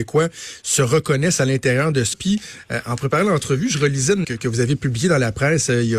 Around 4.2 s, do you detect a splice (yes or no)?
yes